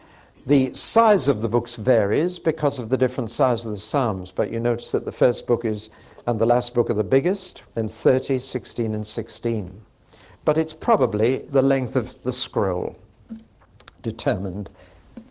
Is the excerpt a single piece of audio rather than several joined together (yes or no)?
no